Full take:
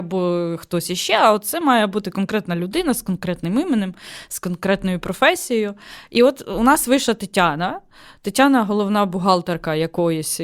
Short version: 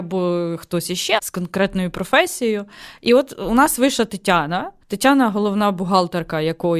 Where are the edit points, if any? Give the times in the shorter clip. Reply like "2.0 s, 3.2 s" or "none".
1.2 s, 4.8 s